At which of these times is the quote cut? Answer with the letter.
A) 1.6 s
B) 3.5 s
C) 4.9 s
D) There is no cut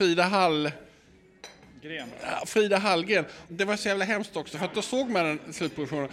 B